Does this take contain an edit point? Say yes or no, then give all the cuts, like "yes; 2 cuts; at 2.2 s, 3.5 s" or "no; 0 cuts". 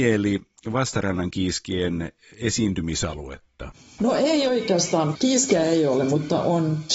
no; 0 cuts